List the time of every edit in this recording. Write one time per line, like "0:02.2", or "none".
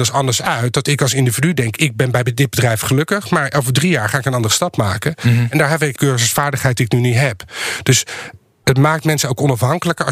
0:06.0